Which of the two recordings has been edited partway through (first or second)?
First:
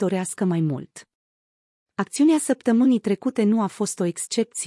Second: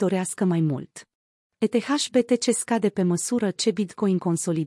second